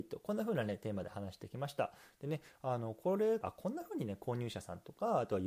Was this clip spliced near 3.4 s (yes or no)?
yes